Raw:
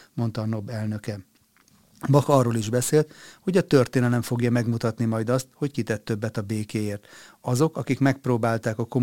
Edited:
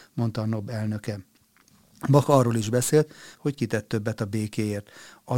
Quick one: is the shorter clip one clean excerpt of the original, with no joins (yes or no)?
no